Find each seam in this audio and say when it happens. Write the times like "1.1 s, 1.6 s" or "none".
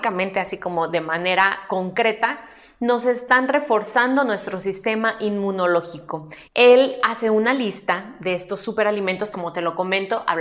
6.4 s, 9.3 s

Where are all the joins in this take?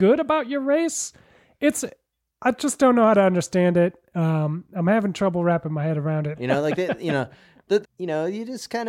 6.4 s, 7.8 s

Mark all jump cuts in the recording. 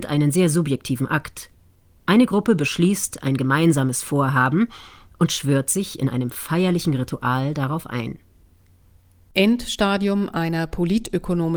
none

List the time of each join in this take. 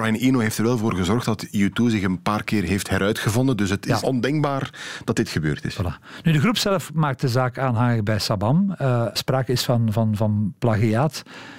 4.0 s, 9.2 s

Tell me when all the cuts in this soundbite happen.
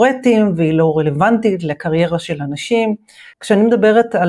3.3 s

